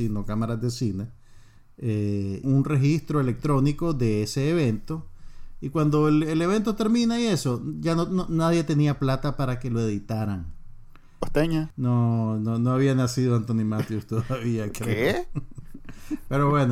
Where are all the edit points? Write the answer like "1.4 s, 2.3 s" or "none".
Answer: 2.4 s, 11.2 s